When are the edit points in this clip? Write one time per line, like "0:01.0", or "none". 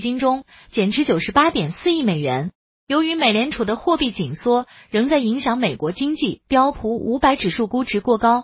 none

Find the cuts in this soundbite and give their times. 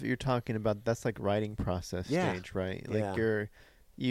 none

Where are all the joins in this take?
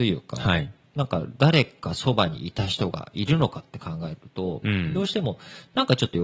none

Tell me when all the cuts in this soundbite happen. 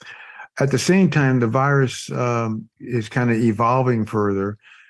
0:02.7

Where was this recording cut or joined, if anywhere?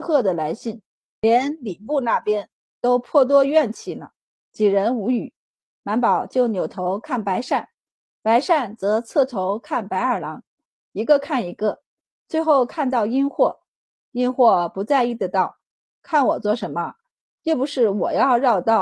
0:01.0

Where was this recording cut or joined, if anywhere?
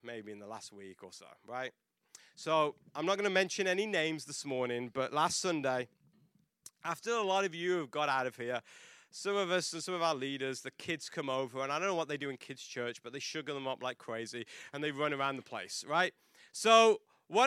none

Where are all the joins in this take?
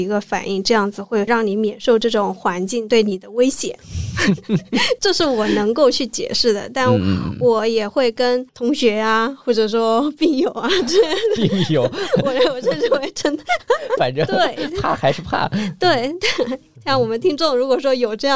0:14.0

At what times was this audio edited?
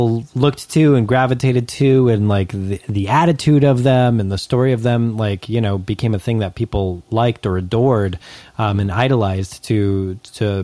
none

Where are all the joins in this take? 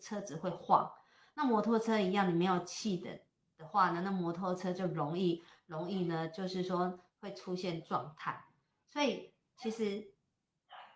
none

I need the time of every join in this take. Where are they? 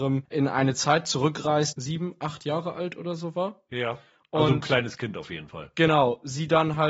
0:01.7

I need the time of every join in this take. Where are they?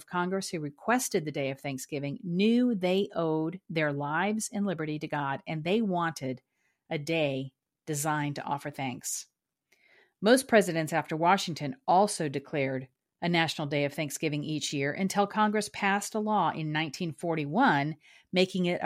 none

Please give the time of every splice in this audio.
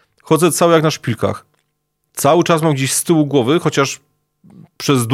none

